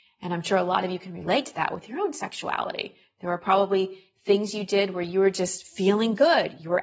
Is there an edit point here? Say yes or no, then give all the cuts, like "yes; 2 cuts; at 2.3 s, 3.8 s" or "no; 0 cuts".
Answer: no; 0 cuts